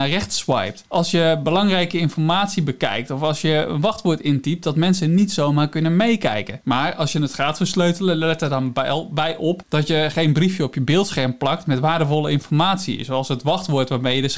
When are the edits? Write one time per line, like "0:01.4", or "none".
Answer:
0:06.6

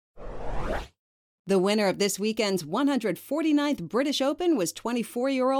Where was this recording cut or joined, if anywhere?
none

